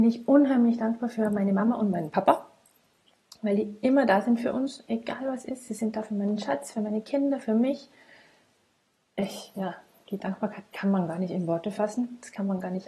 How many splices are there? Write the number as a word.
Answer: zero